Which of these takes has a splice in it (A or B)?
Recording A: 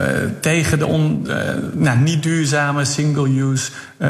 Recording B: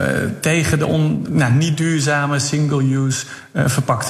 B